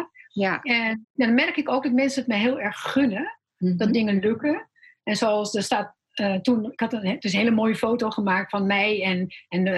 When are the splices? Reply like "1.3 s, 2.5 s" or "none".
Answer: 1.0 s